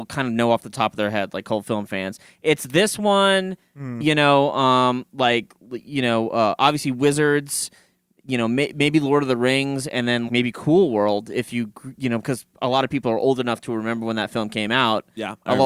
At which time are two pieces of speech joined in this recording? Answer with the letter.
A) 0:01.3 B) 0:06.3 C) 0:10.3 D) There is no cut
C